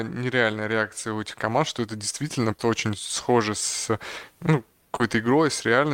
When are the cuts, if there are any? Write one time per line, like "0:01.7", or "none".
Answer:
0:02.6